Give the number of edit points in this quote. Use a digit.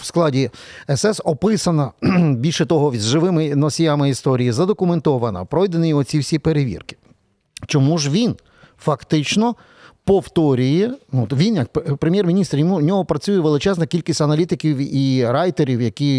0